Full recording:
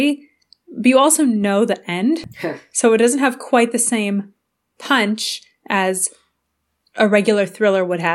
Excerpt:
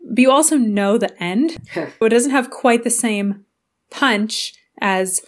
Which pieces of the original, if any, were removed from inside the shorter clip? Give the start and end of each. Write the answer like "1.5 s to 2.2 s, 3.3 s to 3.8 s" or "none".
2.7 s to 2.9 s

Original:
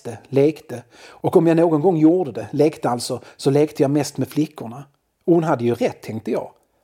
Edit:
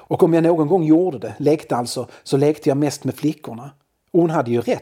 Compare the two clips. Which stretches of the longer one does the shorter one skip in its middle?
none

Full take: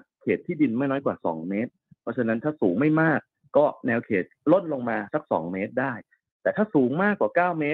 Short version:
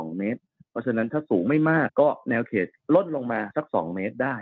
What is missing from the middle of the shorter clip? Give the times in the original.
3.2 s to 3.5 s

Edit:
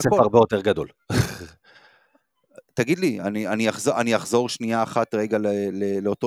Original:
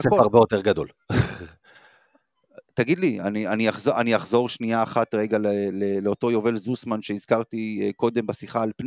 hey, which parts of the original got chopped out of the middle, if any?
none

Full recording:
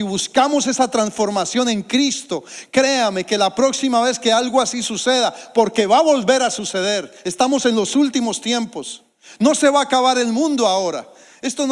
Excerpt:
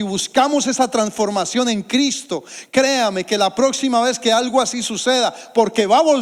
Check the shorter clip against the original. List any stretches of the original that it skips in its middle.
none

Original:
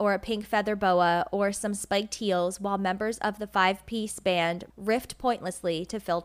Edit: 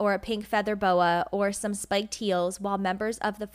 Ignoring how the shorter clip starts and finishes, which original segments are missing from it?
none

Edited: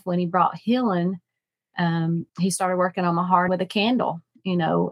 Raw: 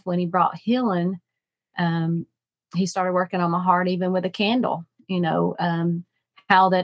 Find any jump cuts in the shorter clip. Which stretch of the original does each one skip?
2.3 s to 2.6 s, 3.8 s to 4.1 s

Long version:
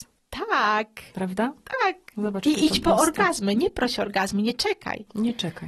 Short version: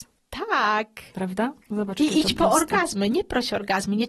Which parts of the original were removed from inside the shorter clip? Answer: 1.6 s to 2.1 s

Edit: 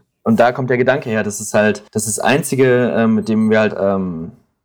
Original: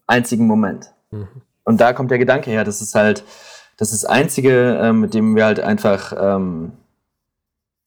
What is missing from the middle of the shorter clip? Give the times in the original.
3.3 s to 3.7 s, 5.6 s to 6.1 s

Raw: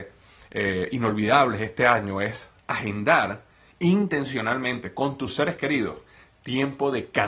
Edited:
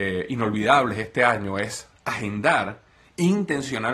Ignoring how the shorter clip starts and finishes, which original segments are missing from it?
none

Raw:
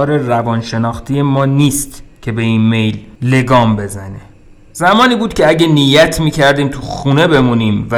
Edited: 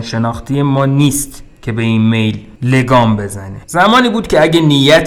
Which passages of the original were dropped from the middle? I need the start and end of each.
4.2 s to 4.7 s

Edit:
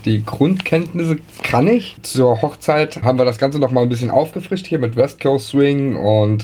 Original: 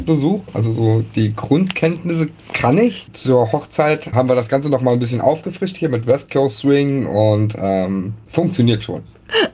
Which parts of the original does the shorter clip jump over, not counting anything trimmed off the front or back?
none

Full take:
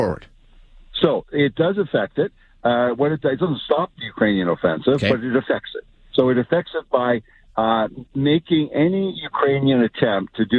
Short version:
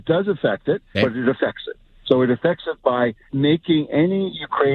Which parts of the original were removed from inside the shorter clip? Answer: 2.4 s to 5.0 s, 7.3 s to 8.1 s

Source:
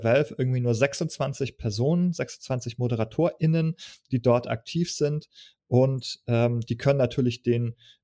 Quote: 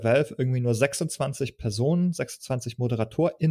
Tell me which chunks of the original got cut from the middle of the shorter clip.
none

